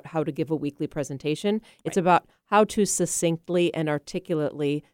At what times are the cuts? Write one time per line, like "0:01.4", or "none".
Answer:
none